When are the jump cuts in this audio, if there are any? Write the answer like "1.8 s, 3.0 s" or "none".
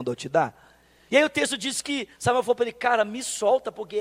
1.1 s